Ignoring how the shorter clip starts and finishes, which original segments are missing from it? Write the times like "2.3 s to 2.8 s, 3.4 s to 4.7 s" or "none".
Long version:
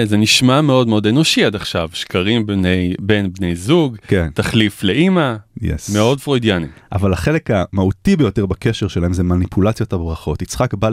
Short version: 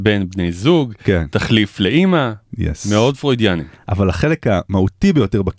none